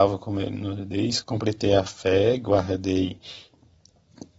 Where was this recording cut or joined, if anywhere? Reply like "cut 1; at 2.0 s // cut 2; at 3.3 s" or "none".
cut 1; at 1.2 s